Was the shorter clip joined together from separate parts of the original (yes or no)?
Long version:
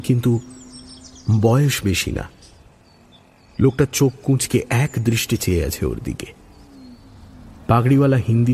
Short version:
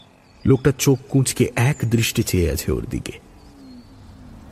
no